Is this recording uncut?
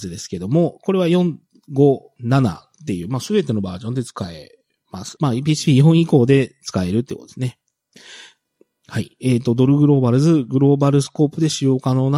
no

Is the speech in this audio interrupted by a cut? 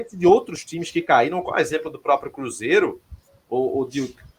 no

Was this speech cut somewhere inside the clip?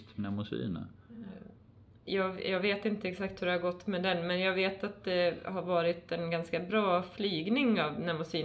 no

